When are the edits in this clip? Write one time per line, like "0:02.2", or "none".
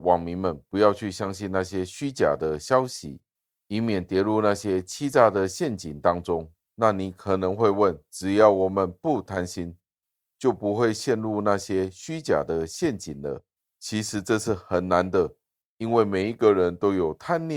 0:06.6